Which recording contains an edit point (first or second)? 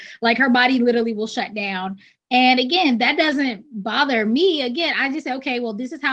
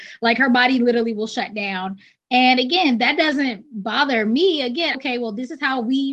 second